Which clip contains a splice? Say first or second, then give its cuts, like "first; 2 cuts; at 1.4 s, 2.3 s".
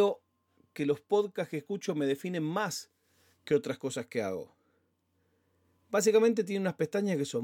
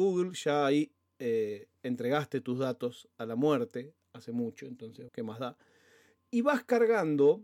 second; 1 cut; at 5.1 s